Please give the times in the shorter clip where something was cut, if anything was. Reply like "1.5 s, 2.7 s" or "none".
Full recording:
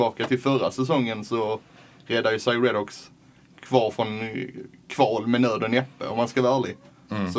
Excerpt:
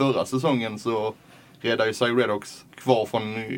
2.7 s